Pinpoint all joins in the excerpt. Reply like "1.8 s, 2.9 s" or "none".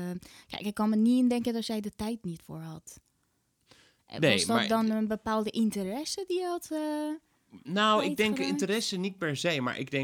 none